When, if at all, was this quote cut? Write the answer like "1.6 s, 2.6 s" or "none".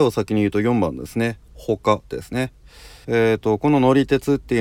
3.0 s